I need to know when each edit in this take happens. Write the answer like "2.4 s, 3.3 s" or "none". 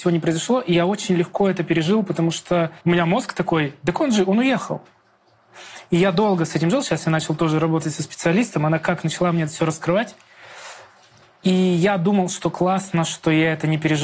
2.8 s

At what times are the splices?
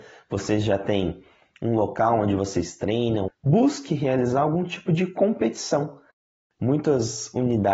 3.3 s, 6.5 s

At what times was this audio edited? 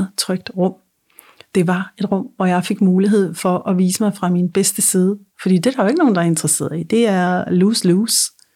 5.3 s

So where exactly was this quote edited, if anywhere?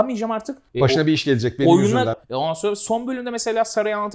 2.1 s

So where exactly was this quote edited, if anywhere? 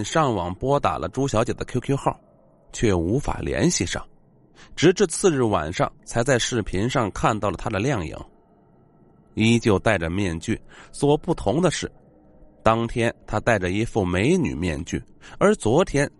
none

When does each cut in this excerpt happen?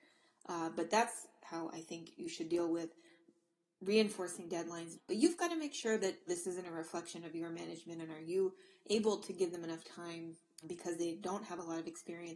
4.9 s, 6.3 s, 10.6 s

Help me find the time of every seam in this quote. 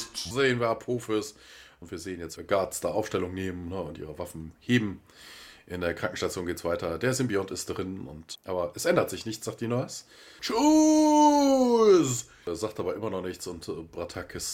2.4 s, 8.3 s, 10.4 s

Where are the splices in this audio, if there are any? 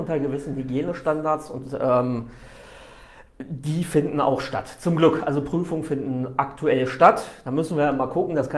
none

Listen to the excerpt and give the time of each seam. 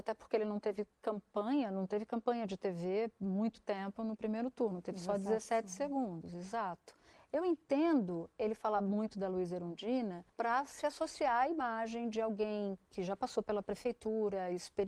7.1 s, 10.3 s

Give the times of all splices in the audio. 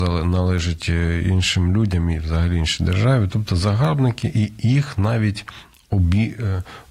none

